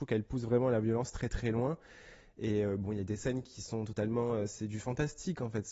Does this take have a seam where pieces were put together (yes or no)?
no